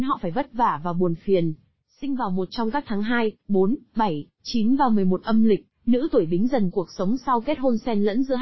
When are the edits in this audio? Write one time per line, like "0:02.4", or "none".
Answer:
0:01.8